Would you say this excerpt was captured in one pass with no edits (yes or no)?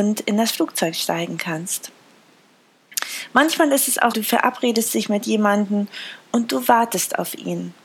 no